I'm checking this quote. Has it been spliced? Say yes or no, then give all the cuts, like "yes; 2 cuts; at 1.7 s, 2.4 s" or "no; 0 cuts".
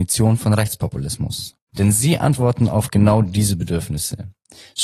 yes; 1 cut; at 1.6 s